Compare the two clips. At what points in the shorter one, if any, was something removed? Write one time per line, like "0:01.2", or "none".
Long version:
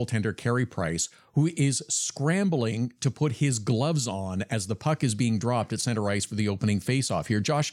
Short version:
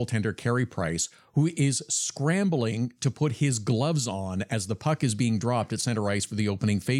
none